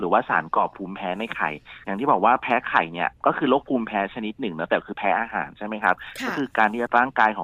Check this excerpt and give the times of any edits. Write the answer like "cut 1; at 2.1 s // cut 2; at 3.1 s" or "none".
cut 1; at 3.2 s